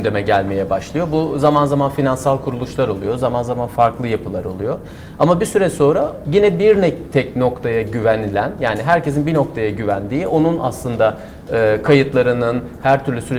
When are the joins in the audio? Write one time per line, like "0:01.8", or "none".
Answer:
none